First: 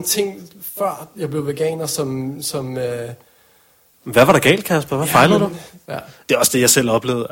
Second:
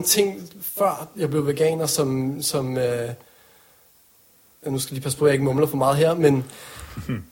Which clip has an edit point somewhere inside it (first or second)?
first